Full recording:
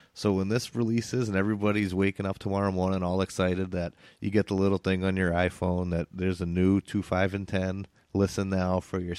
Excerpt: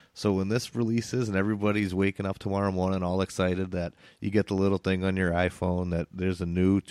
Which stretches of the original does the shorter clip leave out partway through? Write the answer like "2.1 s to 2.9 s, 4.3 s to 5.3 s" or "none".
none